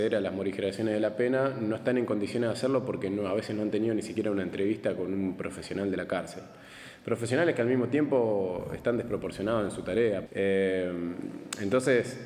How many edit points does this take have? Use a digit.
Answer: 1